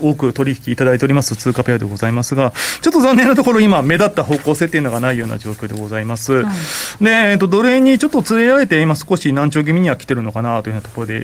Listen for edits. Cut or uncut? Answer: uncut